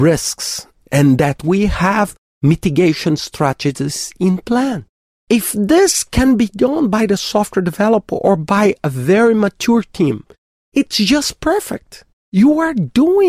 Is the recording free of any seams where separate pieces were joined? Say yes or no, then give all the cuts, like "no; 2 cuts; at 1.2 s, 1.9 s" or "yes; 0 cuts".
no; 1 cut; at 12.1 s